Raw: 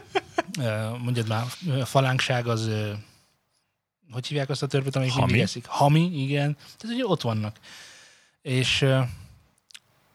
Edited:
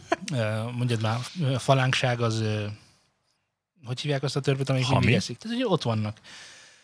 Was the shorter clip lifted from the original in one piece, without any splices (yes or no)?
no